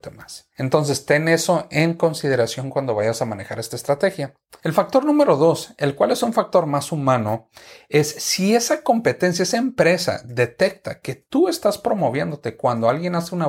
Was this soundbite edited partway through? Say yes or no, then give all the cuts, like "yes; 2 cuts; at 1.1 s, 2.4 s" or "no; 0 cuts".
no; 0 cuts